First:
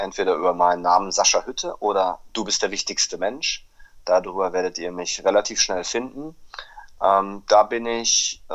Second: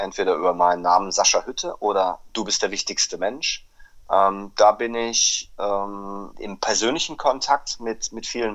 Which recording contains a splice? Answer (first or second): second